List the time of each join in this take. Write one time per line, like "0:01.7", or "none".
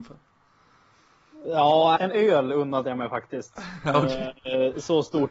0:02.0